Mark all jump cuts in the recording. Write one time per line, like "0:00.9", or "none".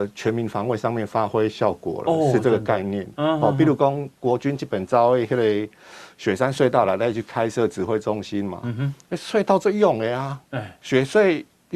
none